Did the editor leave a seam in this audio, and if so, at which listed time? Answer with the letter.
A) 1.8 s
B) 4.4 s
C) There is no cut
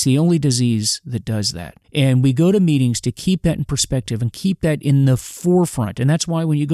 A